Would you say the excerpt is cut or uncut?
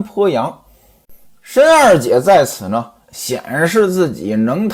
cut